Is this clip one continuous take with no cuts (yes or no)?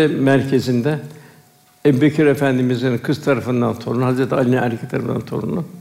yes